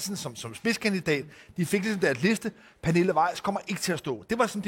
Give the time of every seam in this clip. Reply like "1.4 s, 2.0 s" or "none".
none